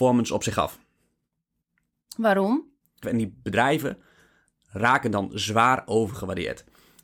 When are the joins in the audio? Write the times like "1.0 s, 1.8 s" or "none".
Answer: 3.0 s